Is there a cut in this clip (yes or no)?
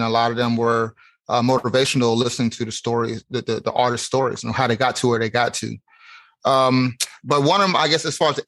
no